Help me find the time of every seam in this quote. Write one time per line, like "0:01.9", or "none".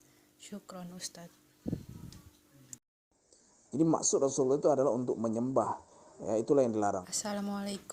0:03.7
0:07.0